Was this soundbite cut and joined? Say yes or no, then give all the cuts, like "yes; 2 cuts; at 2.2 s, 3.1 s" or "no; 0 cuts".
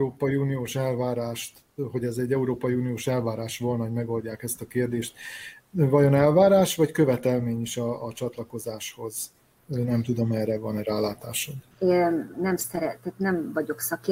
yes; 1 cut; at 11.7 s